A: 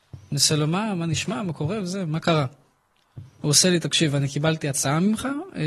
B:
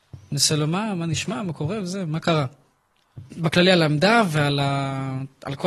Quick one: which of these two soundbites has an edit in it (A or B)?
B